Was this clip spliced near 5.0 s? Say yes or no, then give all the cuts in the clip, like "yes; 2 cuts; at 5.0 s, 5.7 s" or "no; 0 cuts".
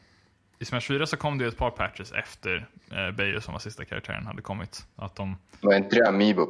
yes; 1 cut; at 5.0 s